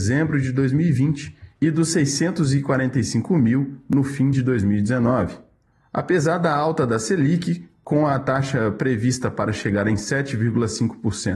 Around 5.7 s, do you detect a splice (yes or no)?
no